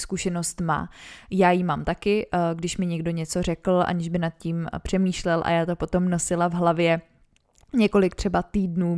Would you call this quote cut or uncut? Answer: uncut